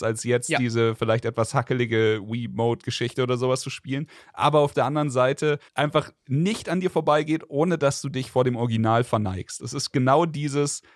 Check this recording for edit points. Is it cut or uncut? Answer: cut